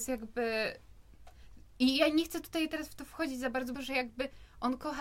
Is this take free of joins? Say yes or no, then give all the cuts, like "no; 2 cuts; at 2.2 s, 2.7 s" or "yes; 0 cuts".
no; 1 cut; at 3.7 s